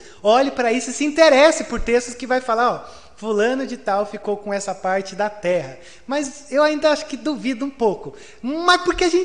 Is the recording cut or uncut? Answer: uncut